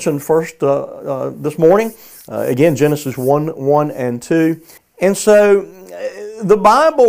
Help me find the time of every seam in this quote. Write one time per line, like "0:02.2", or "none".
0:04.8

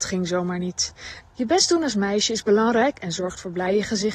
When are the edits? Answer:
0:01.2

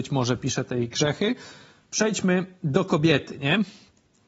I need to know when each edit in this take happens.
none

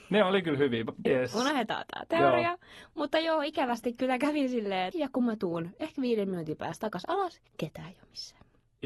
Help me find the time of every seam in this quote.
0:01.1
0:04.9
0:07.5

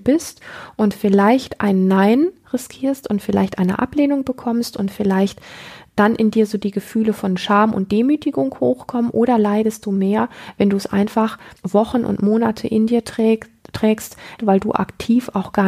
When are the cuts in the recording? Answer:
0:11.6
0:14.4

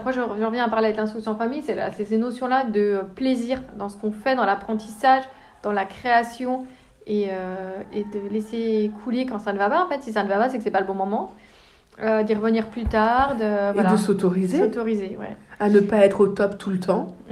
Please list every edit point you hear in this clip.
0:07.9

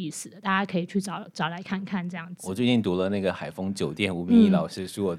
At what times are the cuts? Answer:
none

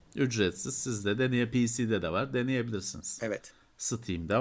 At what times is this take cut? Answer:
none

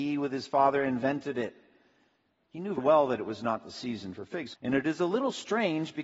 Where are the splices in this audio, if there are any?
0:02.8
0:04.5

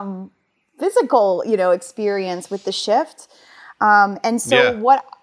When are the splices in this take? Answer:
none

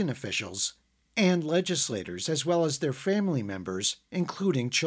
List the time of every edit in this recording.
none

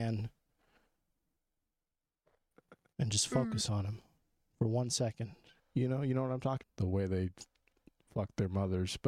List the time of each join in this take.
0:05.6
0:06.6

